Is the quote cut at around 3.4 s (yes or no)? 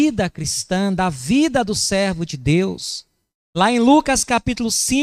yes